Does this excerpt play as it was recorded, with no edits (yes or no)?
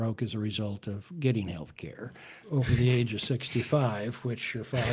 no